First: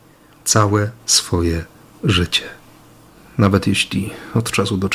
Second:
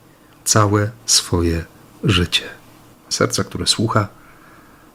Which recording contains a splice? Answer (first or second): second